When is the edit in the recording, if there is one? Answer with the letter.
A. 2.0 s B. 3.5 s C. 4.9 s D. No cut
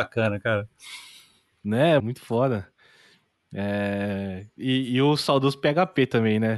A